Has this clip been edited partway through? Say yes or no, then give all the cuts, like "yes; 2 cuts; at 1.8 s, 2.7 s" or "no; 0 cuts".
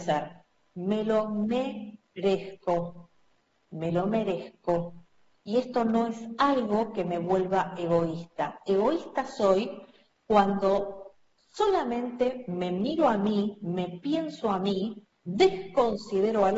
no; 0 cuts